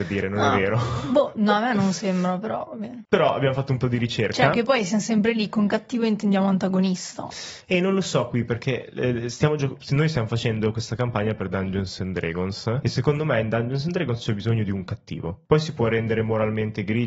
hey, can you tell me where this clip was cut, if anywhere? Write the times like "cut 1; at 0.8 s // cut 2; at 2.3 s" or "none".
none

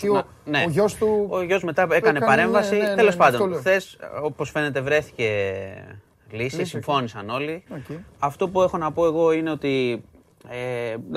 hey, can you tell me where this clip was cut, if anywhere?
cut 1; at 7.7 s

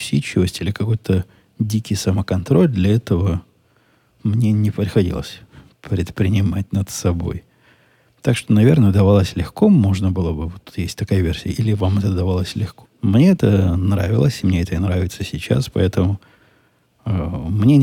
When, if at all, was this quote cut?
cut 1; at 12.8 s

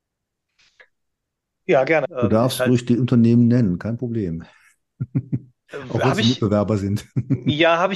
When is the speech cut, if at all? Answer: cut 1; at 2.0 s

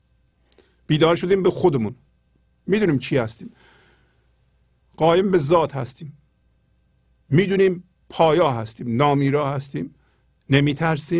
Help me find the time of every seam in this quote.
none

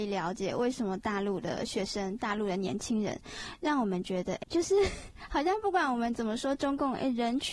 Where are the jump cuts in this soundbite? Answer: cut 1; at 4.4 s

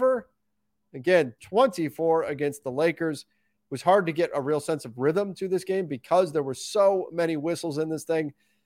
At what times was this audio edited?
cut 1; at 1.4 s

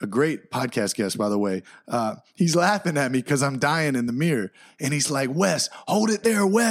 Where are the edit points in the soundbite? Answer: none

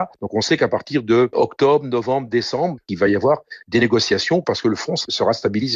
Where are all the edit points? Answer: cut 1; at 1.3 s

